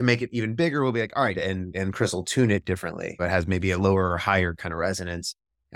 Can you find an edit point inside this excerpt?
yes; 2 cuts; at 1.3 s, 3.2 s

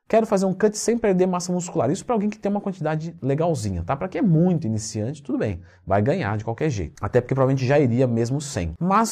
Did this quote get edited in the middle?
no; 0 cuts

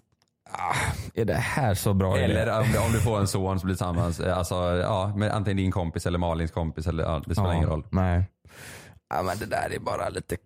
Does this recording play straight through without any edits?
yes; 0 cuts

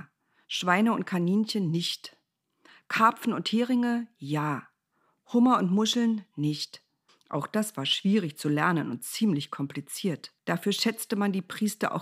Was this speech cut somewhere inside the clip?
yes; 2 cuts; at 7.1 s, 10.4 s

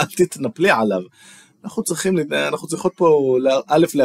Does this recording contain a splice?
no; 0 cuts

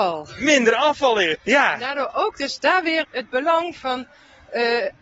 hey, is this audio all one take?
no; 2 cuts; at 1.3 s, 3.0 s

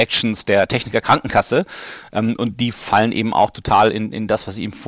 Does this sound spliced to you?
no; 0 cuts

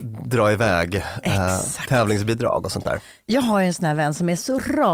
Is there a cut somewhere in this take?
no; 0 cuts

